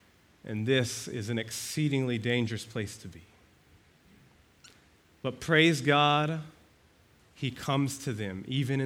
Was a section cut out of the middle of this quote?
yes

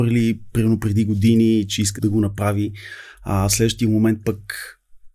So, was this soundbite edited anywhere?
yes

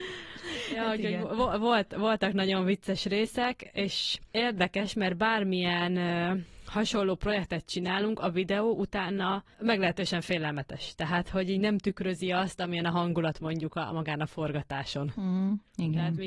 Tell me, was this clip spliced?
no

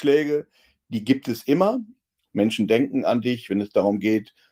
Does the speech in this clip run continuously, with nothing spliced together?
no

